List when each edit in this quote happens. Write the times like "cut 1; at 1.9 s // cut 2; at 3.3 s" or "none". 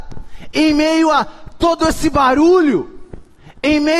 none